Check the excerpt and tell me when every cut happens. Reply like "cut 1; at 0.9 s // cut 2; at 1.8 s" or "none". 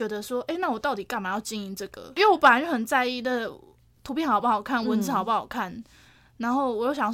none